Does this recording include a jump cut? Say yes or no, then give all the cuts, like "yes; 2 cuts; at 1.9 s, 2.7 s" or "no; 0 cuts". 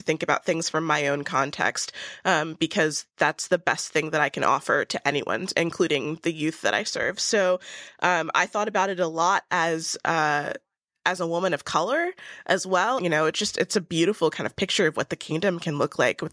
yes; 1 cut; at 13.0 s